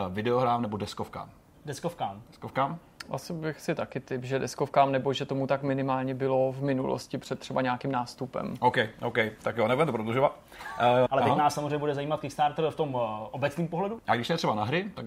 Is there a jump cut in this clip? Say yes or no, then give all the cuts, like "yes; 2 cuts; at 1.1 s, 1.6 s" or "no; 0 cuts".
yes; 2 cuts; at 11.1 s, 14.0 s